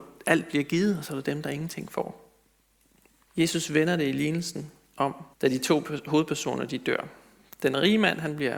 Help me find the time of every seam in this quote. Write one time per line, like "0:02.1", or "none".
0:03.3
0:05.3